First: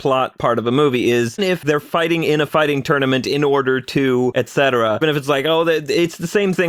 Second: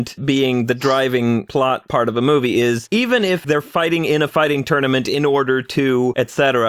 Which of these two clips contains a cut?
first; 2 cuts; at 1.4 s, 5.0 s

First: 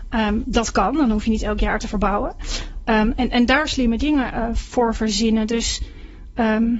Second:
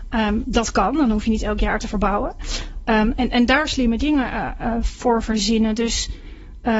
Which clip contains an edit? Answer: first; 1 cut; at 4.3 s

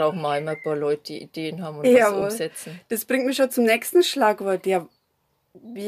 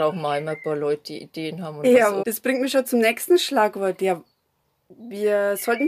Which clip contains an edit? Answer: second; 1 cut; at 2.2 s

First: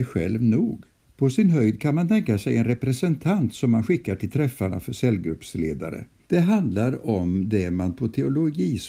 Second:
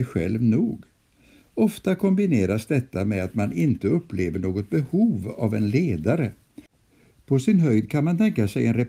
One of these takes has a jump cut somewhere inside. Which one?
first; 2 cuts; at 1.0 s, 6.2 s

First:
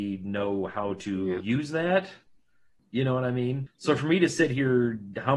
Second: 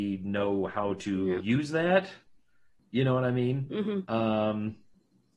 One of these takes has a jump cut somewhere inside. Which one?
first; 1 cut; at 3.7 s

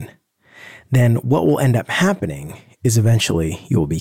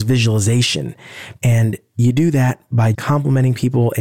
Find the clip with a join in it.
second; 2 cuts; at 1.4 s, 2.9 s

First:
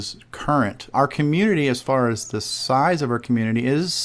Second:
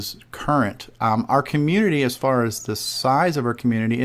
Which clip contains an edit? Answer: first; 1 cut; at 0.9 s

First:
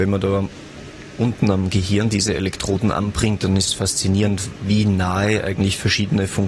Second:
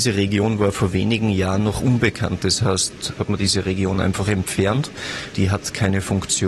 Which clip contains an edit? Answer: second; 2 cuts; at 3.2 s, 5.3 s

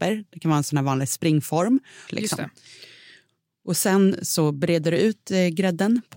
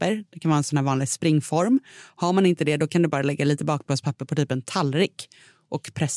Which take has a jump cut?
first; 1 cut; at 2.1 s

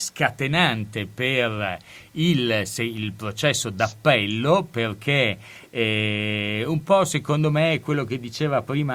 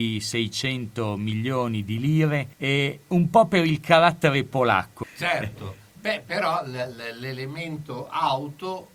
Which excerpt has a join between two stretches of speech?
second; 2 cuts; at 2.5 s, 5.0 s

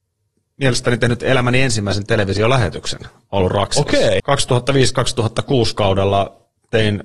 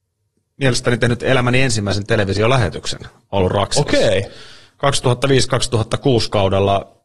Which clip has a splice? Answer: first; 1 cut; at 4.2 s

